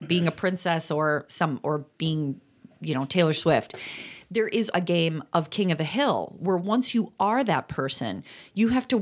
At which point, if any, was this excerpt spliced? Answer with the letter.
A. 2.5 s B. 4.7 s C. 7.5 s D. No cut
B